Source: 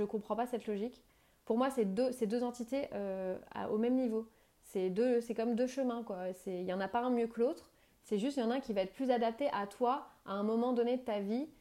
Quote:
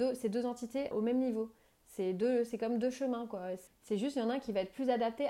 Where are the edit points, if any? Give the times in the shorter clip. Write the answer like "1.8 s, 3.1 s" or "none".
0.9 s, 3.7 s